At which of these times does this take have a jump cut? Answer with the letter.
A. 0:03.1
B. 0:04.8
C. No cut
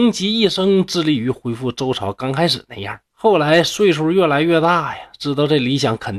A